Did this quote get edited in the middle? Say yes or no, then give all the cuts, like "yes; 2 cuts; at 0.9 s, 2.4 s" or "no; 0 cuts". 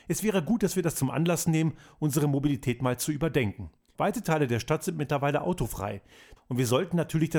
yes; 2 cuts; at 3.9 s, 6.4 s